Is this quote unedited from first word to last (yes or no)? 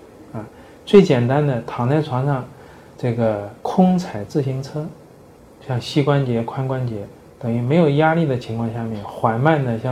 no